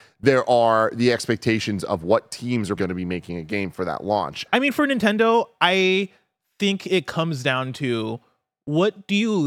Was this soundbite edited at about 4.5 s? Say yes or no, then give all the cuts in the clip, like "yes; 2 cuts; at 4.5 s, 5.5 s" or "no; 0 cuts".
yes; 2 cuts; at 2.8 s, 4.5 s